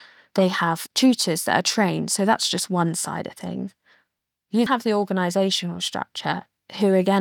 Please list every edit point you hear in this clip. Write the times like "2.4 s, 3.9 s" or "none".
4.7 s